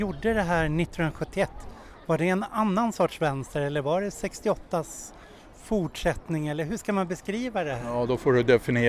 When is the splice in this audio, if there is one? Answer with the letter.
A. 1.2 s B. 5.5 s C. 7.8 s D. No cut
D